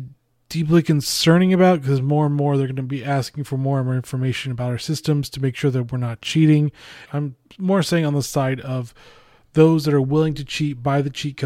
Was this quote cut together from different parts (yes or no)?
yes